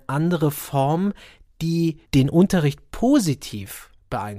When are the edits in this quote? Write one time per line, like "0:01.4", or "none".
0:02.0